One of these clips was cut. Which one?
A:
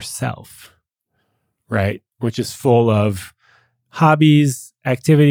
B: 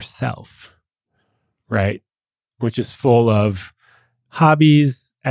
A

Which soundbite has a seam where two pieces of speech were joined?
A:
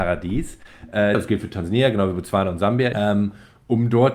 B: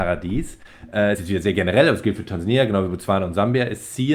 A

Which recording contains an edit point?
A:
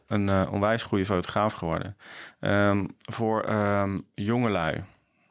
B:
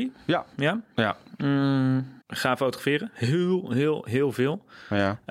B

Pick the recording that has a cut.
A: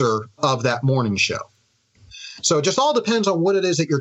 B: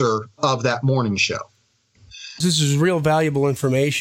B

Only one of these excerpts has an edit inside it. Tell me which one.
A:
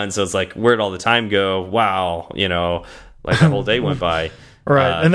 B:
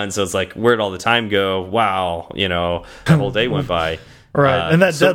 B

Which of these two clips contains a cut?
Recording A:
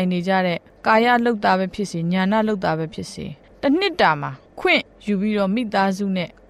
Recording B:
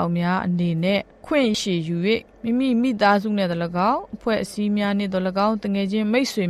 B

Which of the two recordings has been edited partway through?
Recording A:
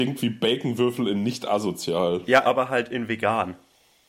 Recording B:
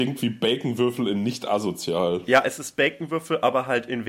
A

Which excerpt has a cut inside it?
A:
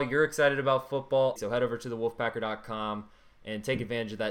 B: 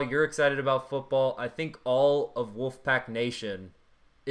A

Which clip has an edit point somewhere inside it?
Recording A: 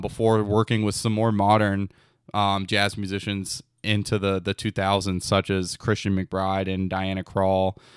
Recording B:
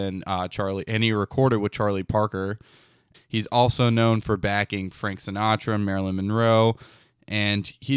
B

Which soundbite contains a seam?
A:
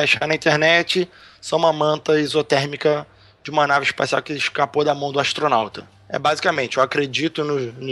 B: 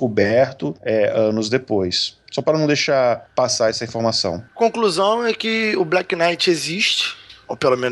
A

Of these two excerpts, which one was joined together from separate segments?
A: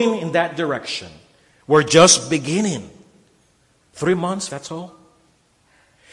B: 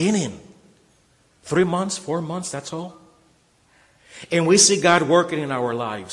A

